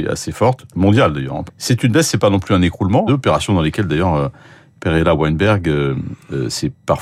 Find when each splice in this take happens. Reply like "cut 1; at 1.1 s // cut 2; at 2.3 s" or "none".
cut 1; at 1.5 s // cut 2; at 3.1 s